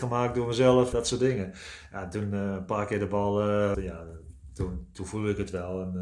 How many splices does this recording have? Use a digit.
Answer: 2